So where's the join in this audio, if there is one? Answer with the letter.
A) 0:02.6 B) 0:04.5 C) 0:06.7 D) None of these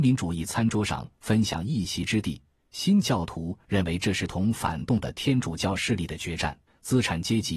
C